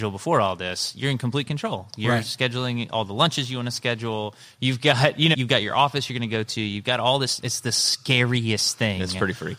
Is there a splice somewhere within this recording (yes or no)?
yes